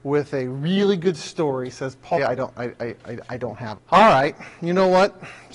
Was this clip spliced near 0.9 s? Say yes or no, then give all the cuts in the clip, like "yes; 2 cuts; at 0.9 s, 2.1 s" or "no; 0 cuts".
no; 2 cuts; at 2.2 s, 3.8 s